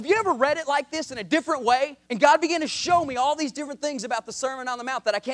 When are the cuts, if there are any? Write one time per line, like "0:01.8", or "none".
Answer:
0:02.0